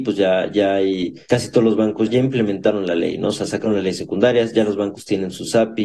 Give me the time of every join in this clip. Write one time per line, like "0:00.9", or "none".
0:02.1